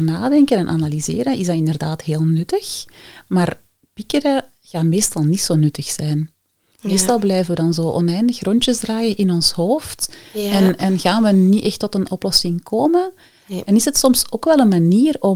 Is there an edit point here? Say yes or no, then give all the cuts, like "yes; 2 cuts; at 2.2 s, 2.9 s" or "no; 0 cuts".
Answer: no; 0 cuts